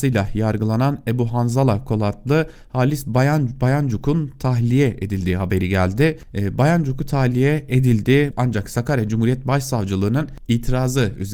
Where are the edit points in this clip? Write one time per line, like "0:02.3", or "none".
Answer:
0:08.3